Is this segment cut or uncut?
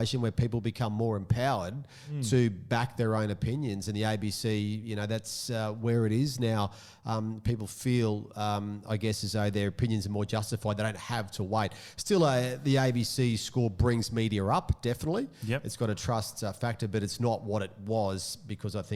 uncut